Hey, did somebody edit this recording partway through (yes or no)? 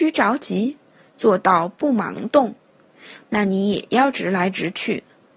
yes